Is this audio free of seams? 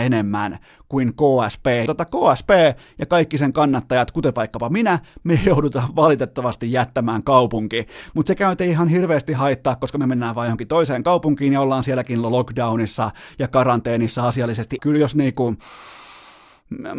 no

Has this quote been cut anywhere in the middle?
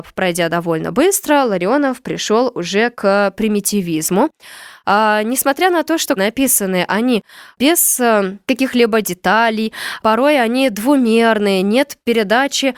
yes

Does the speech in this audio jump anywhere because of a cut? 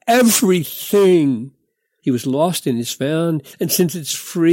yes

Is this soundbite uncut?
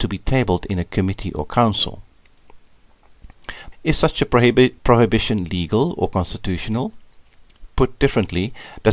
no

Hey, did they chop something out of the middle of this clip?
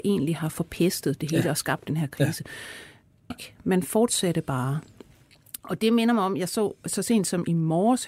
yes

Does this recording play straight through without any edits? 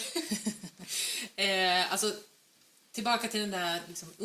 yes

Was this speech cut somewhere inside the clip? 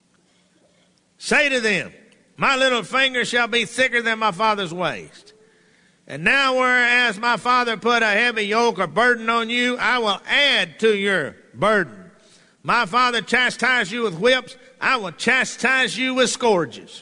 no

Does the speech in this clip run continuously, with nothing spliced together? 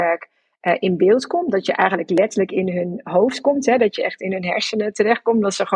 yes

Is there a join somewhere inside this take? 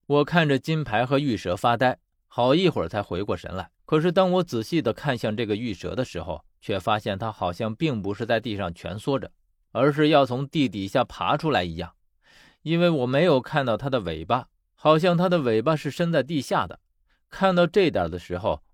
yes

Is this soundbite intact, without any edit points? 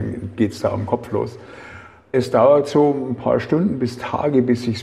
no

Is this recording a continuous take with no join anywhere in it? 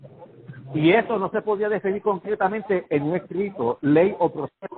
yes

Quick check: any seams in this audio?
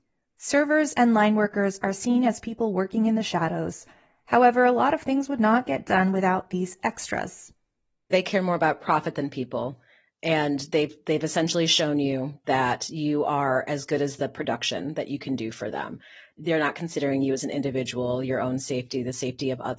no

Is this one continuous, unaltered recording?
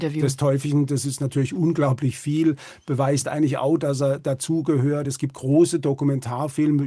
yes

